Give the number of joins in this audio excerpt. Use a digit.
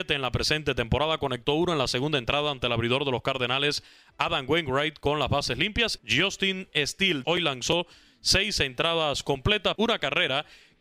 3